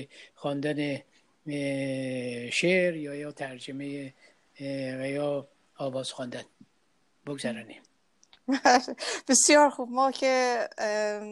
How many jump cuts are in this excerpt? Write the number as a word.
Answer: zero